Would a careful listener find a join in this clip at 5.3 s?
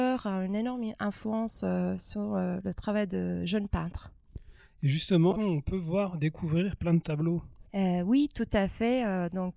yes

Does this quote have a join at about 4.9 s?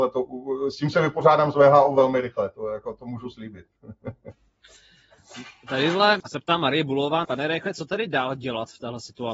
no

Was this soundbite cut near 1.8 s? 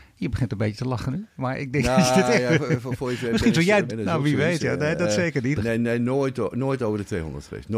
no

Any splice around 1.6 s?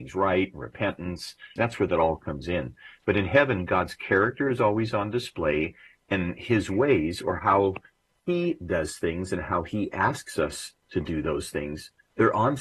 yes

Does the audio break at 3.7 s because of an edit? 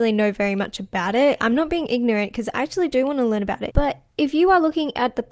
yes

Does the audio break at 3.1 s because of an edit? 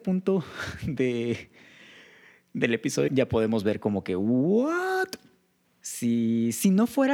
yes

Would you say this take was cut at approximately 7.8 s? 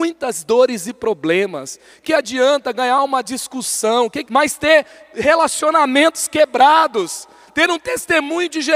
no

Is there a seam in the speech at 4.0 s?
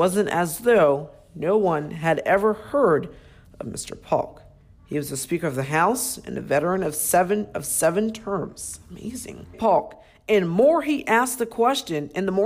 no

